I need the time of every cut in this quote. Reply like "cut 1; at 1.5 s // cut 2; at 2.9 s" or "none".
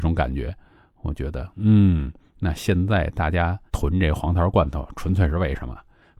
cut 1; at 3.7 s